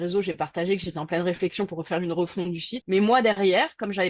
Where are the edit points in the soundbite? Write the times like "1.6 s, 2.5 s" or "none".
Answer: 2.8 s